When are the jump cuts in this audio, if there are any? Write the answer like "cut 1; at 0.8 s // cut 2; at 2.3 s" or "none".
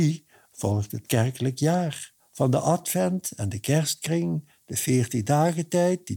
none